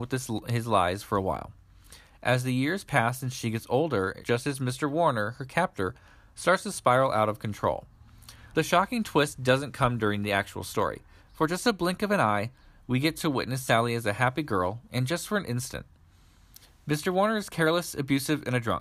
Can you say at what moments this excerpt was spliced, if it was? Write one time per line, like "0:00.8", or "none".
0:04.2
0:08.5
0:11.2